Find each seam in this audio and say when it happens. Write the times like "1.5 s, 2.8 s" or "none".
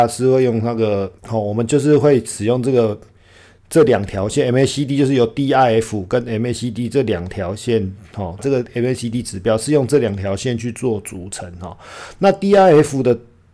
1.2 s, 8.4 s